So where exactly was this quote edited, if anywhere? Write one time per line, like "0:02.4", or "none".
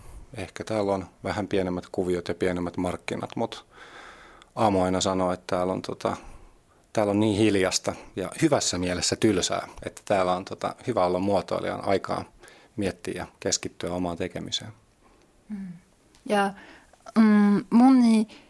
none

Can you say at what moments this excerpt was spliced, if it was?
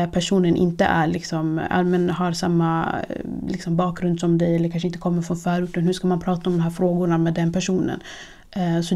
none

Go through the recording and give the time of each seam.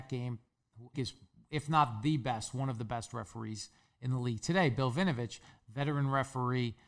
0:00.9

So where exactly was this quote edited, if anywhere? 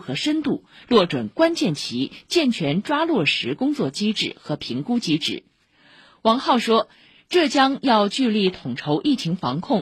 none

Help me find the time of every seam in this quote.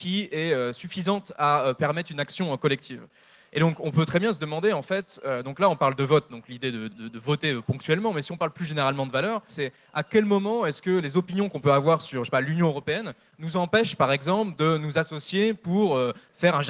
0:06.9
0:09.5

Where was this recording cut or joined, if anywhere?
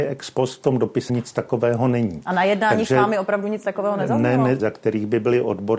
0:01.1
0:04.6

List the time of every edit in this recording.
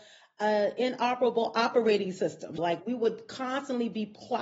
0:02.6

